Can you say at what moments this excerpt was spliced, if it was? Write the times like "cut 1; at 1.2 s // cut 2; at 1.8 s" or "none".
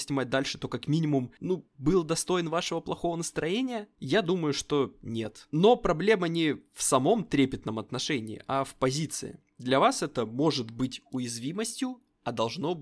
cut 1; at 5.5 s